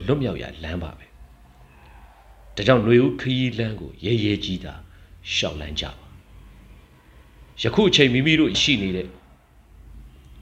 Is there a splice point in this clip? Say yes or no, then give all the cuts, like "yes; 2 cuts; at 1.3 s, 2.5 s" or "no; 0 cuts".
yes; 1 cut; at 8.5 s